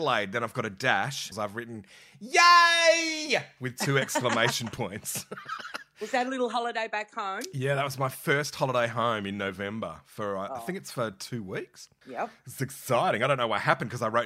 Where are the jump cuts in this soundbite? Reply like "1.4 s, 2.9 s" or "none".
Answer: 1.3 s